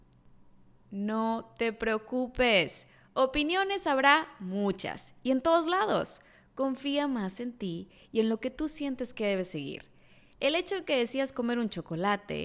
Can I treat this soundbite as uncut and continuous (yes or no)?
yes